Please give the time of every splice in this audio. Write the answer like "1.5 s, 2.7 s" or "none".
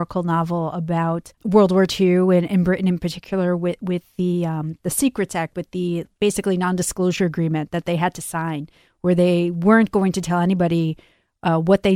1.3 s